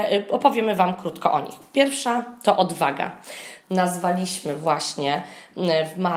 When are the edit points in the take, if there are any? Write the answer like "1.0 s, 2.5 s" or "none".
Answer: 3.6 s

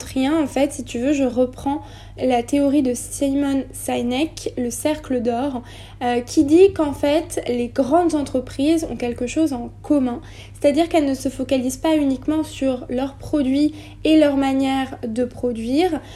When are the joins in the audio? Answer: 2.2 s

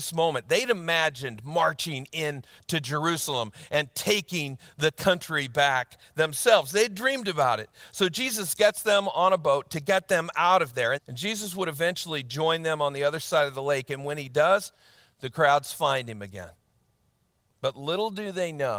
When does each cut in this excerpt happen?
10.9 s

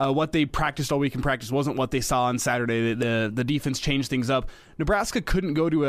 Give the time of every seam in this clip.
none

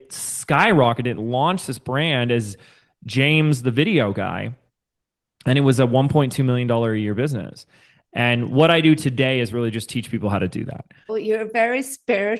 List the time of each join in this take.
11.1 s

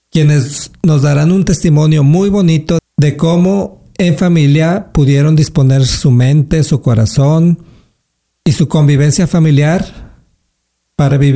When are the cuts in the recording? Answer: 2.8 s

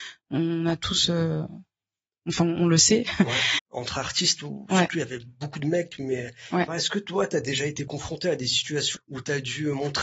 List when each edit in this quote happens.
3.6 s, 6.7 s, 9.0 s

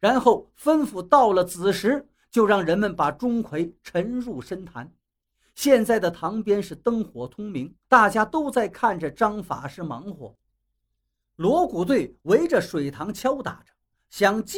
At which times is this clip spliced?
7.8 s

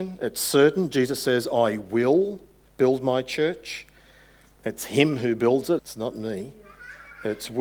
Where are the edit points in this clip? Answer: 5.8 s

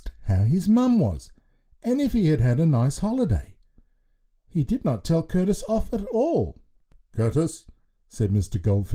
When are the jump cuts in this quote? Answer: 7.9 s

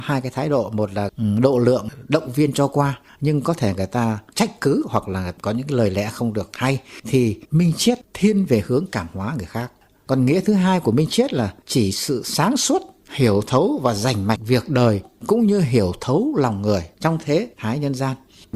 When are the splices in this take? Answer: none

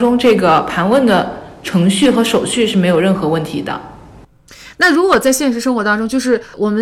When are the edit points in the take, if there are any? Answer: none

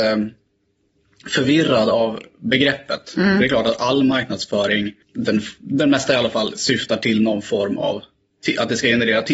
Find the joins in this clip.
5.0 s

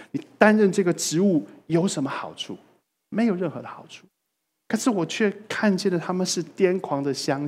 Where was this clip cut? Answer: none

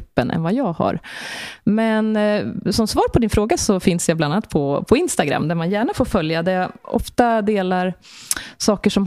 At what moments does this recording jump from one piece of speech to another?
none

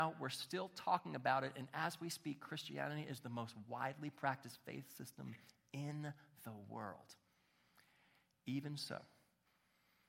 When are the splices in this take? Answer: none

